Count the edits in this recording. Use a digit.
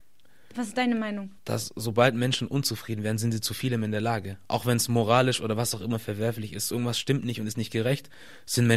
2